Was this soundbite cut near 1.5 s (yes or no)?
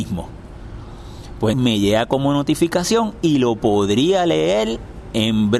yes